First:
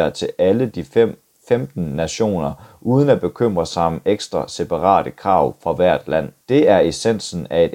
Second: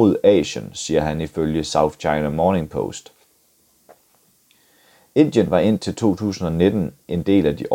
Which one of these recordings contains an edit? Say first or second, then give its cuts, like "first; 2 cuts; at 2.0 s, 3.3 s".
first; 1 cut; at 6.4 s